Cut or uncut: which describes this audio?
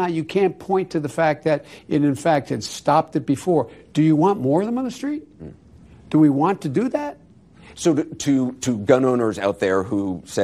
uncut